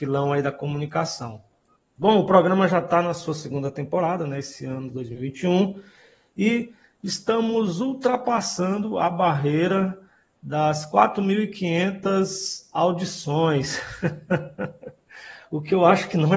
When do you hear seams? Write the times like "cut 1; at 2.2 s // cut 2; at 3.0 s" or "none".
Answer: cut 1; at 1.8 s